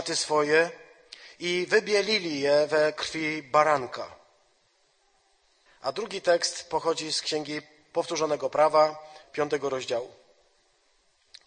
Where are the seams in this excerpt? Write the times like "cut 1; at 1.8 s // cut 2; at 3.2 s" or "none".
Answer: cut 1; at 5.7 s // cut 2; at 9.2 s